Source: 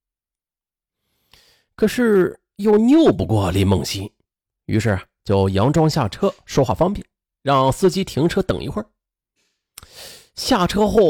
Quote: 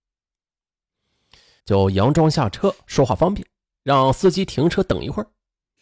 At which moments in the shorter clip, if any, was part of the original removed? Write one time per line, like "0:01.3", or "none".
0:01.6